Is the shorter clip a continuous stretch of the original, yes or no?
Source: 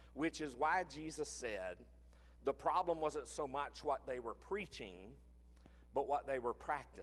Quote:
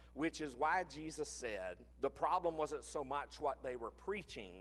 no